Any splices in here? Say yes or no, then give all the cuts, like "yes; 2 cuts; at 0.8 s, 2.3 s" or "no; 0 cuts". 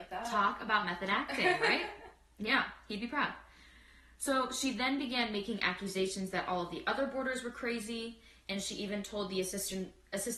no; 0 cuts